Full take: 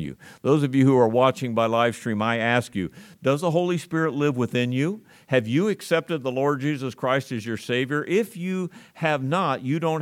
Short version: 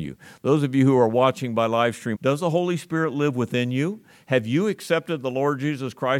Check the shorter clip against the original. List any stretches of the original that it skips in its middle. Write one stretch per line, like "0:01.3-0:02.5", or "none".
0:02.1-0:03.2